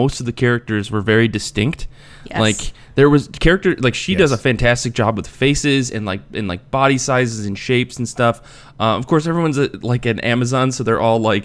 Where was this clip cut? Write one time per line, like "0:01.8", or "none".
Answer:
none